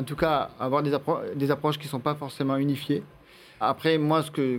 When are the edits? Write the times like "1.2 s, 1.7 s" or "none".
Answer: 3.6 s